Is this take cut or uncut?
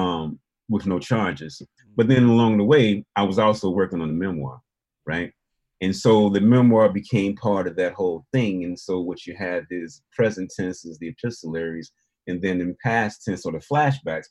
cut